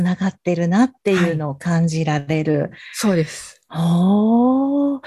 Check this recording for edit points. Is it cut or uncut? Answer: uncut